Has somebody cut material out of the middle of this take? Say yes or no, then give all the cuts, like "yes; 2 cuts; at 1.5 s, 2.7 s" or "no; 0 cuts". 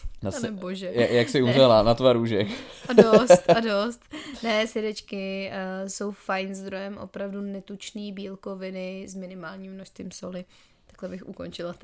no; 0 cuts